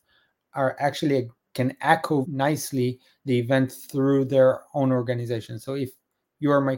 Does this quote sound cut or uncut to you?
cut